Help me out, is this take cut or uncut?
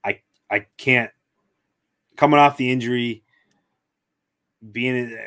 uncut